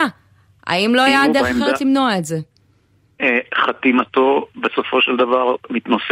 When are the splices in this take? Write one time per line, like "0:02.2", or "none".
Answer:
none